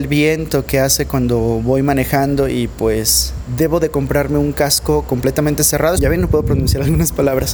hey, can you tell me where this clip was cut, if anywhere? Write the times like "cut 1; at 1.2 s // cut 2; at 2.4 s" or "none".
cut 1; at 6.0 s